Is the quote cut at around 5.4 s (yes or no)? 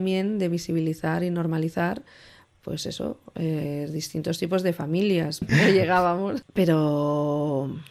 yes